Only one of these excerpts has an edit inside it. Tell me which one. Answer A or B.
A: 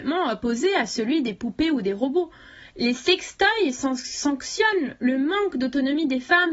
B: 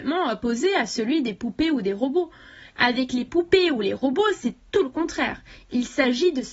B